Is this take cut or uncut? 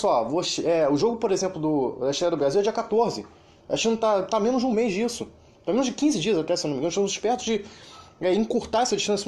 uncut